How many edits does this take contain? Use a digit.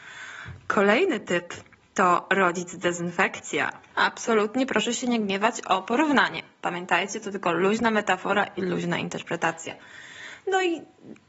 1